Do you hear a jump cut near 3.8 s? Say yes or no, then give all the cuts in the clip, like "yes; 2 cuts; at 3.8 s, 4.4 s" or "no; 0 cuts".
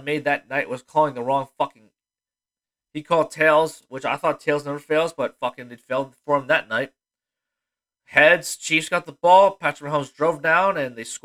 no; 0 cuts